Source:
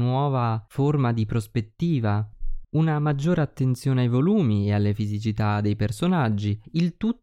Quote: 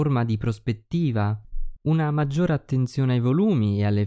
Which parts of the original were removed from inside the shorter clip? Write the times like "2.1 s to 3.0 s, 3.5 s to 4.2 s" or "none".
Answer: none